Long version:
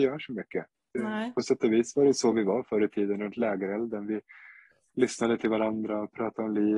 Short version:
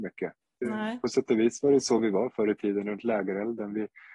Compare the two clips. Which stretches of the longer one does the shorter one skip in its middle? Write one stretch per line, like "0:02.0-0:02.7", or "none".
none